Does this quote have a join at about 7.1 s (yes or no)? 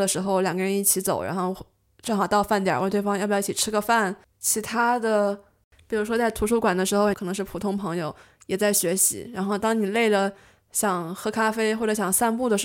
yes